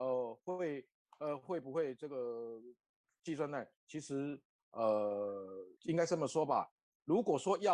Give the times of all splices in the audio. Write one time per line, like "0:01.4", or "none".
0:05.8